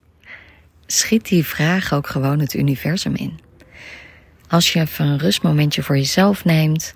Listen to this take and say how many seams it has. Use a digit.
0